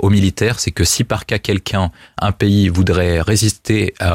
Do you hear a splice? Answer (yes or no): no